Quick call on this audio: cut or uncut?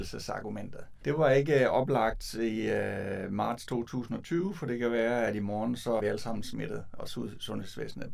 cut